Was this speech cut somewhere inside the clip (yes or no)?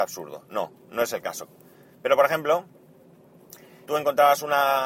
yes